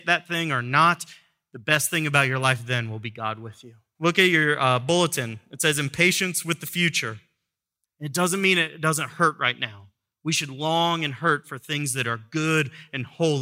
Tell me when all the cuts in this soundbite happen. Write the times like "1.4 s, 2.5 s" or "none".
3.9 s, 7.8 s